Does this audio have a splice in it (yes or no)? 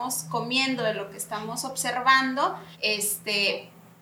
yes